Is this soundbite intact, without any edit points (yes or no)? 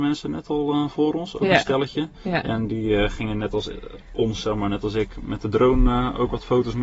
yes